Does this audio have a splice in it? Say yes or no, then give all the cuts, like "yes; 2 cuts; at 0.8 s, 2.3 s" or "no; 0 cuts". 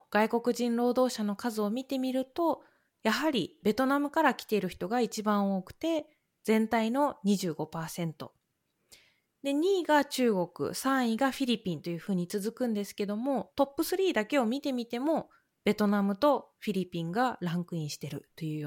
no; 0 cuts